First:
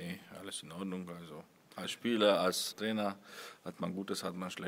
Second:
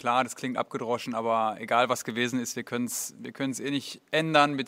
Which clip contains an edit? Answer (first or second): first